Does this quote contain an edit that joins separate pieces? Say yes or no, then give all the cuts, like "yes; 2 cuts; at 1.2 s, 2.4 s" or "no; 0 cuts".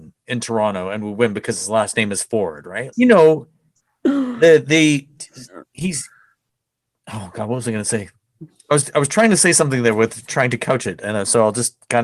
yes; 1 cut; at 2.9 s